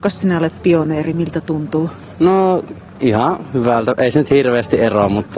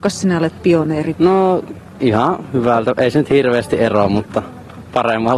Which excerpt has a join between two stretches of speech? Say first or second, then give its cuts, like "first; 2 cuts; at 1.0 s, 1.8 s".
second; 1 cut; at 1.1 s